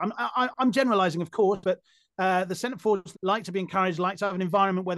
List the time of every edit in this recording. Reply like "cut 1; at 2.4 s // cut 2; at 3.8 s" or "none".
cut 1; at 1.6 s // cut 2; at 3.1 s